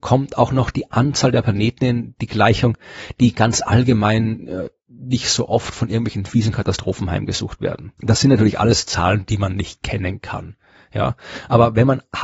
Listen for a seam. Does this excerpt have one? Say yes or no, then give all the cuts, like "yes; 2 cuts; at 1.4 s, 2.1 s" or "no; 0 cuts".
no; 0 cuts